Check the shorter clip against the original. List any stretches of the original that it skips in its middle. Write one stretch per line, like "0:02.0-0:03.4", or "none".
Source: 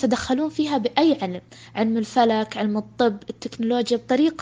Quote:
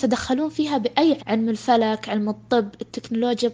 0:01.2-0:01.7